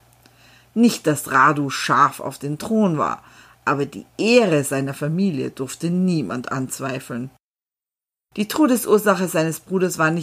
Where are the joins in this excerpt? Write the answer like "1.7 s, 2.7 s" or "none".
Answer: none